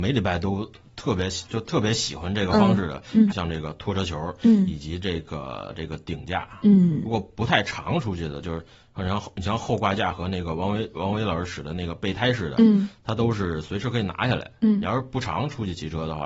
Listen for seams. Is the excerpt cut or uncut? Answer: cut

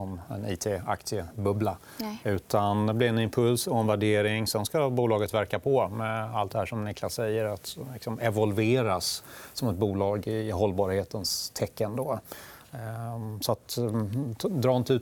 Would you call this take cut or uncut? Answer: uncut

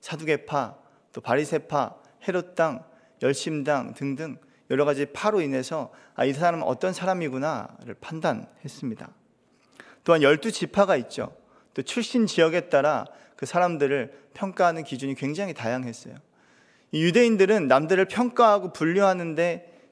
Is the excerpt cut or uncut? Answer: uncut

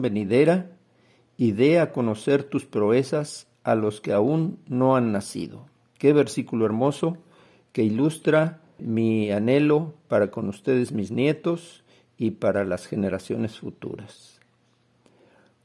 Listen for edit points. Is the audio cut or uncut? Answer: cut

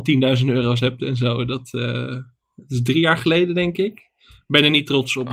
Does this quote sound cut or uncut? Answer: uncut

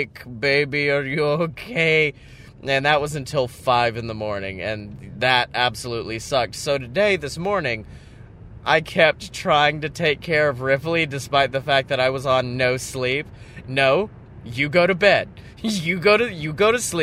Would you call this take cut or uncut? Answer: cut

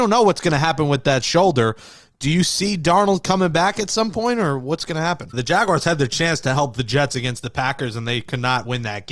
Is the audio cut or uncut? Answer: cut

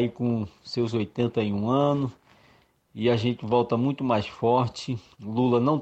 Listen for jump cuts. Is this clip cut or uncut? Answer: uncut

